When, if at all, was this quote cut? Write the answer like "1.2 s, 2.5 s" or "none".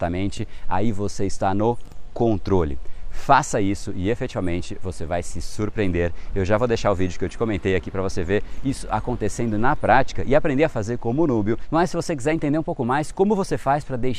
none